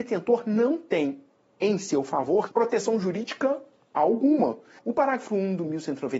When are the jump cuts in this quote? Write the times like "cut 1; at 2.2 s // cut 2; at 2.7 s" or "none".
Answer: cut 1; at 2.5 s // cut 2; at 4.8 s